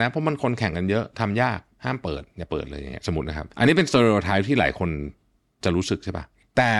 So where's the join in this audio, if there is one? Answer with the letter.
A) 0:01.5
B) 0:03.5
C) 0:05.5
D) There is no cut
B